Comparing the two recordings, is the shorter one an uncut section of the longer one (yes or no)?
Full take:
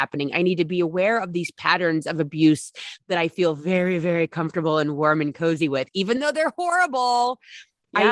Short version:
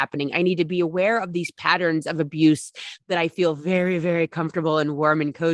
yes